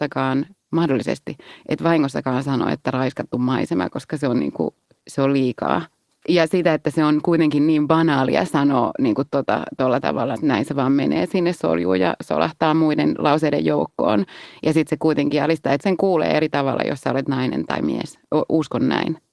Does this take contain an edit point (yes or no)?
yes